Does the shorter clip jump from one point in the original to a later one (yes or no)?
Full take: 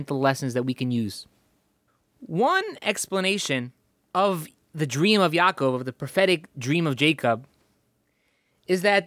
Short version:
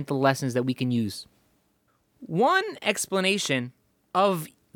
no